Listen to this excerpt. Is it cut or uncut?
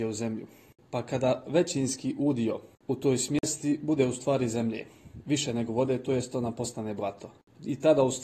uncut